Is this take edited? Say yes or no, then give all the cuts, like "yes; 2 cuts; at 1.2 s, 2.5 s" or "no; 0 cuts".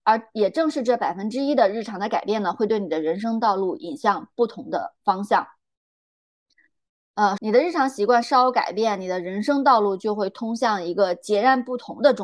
yes; 1 cut; at 7.4 s